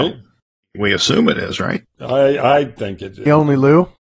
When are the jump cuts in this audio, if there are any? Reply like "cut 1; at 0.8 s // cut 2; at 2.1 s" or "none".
cut 1; at 1.8 s // cut 2; at 3.3 s